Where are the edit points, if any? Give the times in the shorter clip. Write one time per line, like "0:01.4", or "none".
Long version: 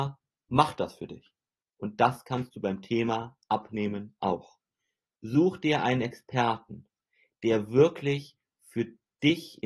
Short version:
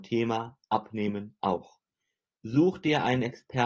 none